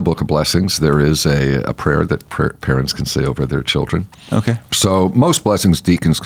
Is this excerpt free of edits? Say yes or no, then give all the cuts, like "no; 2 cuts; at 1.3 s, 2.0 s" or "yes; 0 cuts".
no; 1 cut; at 4.6 s